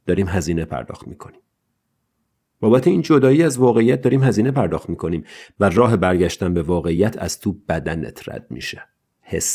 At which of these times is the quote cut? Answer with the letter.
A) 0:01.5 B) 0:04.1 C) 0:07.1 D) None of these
D